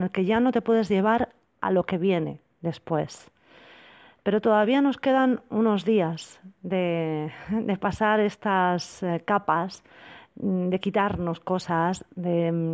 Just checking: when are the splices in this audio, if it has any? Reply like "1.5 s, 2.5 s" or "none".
none

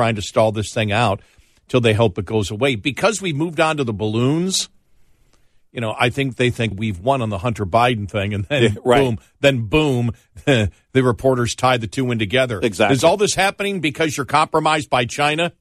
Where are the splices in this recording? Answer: 6.7 s

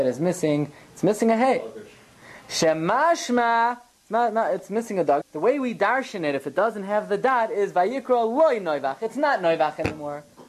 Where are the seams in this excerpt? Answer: 5.2 s

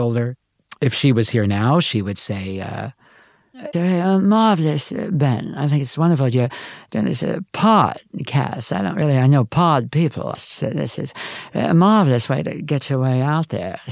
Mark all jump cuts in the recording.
3.7 s, 10.3 s

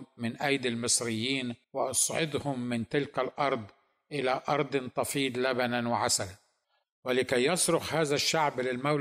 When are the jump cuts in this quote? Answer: 1.6 s

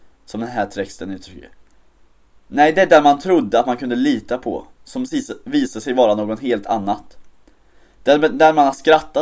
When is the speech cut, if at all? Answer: none

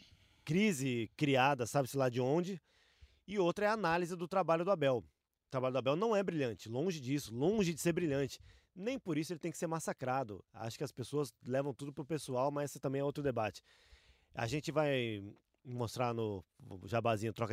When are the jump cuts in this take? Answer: none

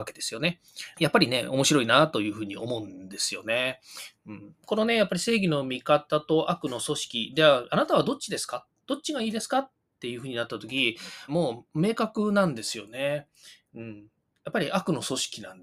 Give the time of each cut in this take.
0.9 s, 11.3 s

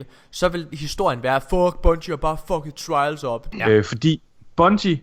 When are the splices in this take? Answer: 3.5 s

